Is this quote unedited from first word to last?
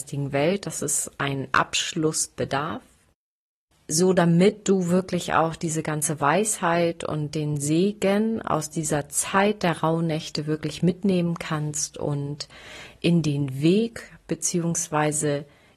yes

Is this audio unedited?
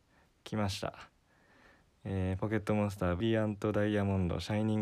no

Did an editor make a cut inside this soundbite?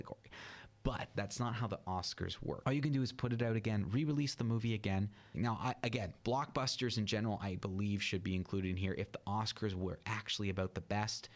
yes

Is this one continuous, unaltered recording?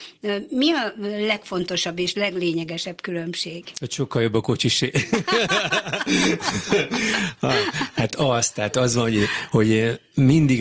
yes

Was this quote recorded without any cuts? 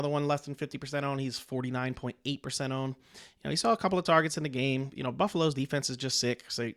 yes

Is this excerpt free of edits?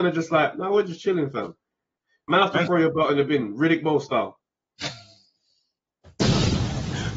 no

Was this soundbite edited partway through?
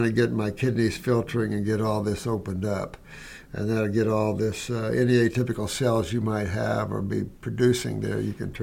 no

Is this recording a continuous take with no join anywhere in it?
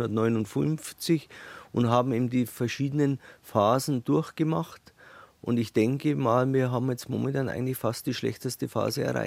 yes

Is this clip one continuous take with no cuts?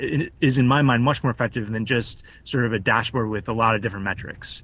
yes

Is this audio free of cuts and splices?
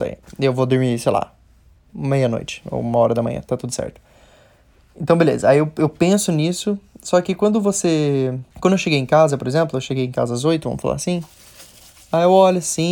no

